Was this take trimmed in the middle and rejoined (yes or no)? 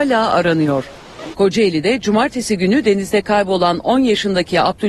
yes